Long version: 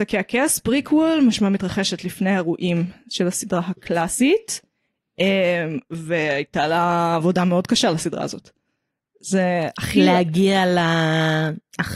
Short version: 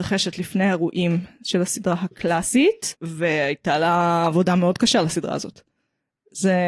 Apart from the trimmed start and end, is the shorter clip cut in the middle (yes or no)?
yes